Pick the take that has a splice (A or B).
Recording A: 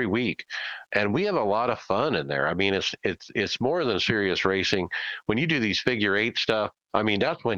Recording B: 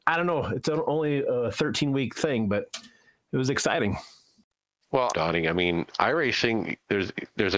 B